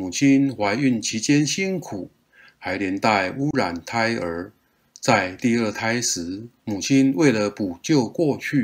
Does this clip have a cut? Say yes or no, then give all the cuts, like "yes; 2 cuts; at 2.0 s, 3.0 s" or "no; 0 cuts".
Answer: no; 0 cuts